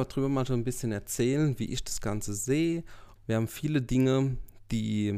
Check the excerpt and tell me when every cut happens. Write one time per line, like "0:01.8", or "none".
0:03.2